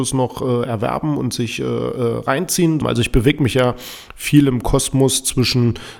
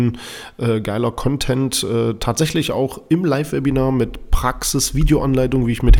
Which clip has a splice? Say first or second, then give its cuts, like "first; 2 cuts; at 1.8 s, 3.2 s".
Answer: first; 1 cut; at 2.8 s